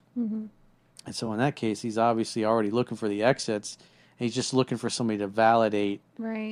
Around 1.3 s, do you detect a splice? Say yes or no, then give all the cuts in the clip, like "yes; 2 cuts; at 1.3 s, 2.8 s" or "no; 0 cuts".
no; 0 cuts